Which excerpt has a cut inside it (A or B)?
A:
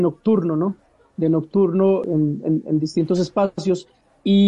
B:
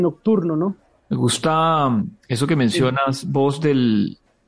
B